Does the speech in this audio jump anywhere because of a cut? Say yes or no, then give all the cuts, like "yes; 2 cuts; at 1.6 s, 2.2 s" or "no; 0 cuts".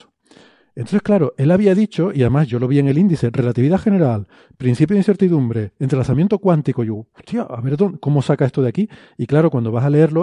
no; 0 cuts